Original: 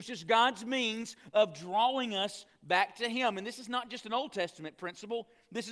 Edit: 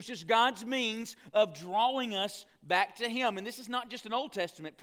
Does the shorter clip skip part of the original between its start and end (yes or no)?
no